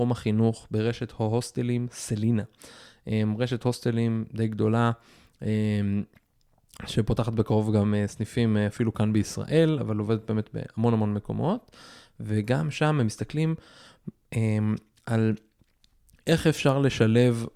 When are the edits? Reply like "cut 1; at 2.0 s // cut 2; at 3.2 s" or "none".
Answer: none